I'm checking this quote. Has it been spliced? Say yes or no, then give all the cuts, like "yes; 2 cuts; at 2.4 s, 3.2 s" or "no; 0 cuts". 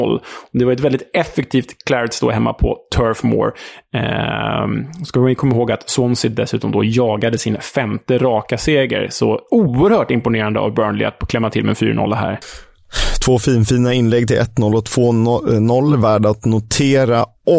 yes; 1 cut; at 1.8 s